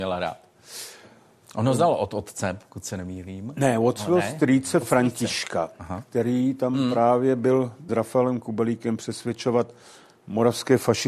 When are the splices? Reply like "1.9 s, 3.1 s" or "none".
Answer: 7.9 s